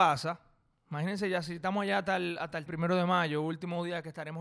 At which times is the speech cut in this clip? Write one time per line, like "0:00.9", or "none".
0:02.7